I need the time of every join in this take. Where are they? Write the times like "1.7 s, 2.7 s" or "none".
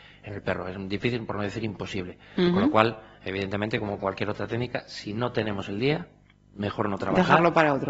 none